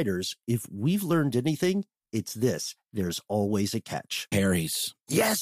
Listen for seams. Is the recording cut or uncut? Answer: cut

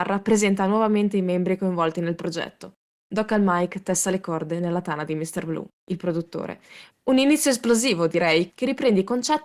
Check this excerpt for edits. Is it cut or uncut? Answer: cut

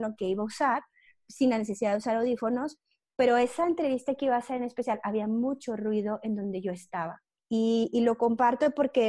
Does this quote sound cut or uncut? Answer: cut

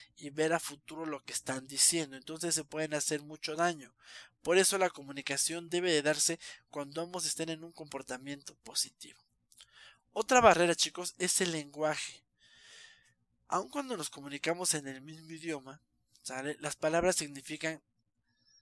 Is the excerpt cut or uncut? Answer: uncut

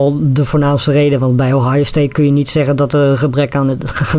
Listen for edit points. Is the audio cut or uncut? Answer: uncut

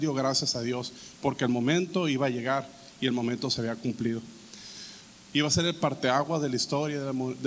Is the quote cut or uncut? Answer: cut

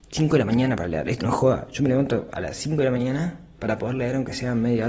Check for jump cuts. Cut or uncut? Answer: cut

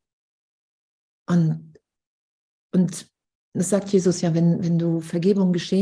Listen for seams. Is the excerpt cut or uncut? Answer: cut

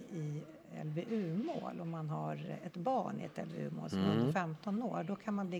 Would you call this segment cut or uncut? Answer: uncut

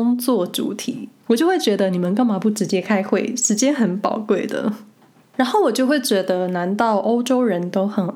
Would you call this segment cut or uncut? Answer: uncut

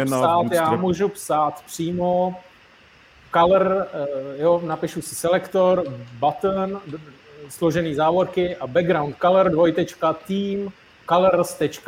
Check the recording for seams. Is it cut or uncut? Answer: uncut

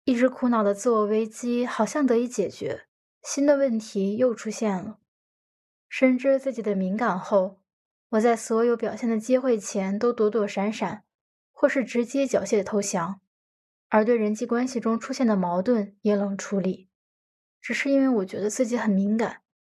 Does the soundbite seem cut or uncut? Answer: uncut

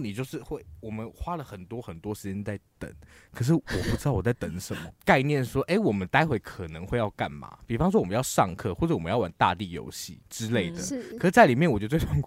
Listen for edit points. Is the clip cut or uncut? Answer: cut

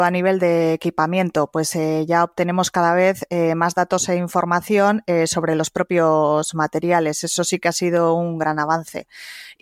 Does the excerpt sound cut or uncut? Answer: uncut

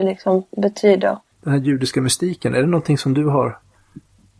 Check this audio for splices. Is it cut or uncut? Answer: cut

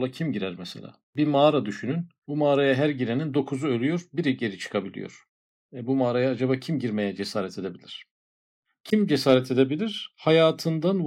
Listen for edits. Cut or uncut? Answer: uncut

